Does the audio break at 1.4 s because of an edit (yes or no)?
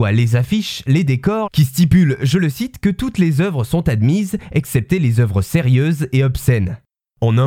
yes